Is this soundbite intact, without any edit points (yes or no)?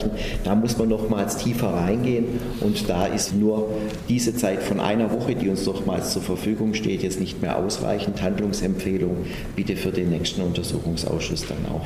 no